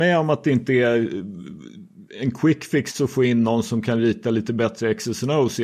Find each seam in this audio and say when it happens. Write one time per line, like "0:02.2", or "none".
none